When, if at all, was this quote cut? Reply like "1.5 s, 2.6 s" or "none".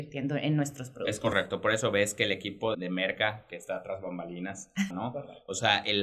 2.7 s, 4.9 s